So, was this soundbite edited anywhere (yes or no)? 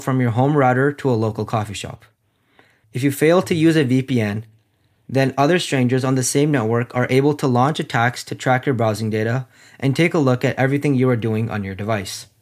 yes